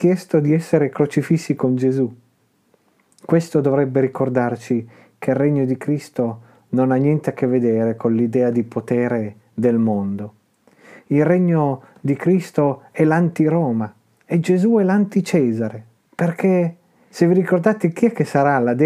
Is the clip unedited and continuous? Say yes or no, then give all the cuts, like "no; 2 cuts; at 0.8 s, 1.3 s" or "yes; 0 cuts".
no; 1 cut; at 16.0 s